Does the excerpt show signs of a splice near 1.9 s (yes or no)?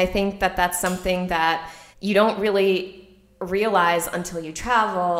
yes